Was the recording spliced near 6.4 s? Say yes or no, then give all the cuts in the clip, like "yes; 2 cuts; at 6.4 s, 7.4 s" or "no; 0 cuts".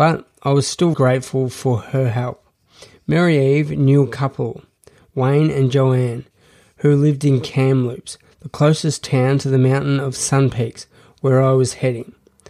no; 1 cut; at 0.9 s